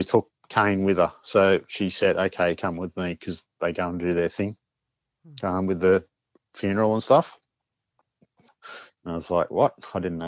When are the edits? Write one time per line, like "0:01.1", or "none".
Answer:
0:08.9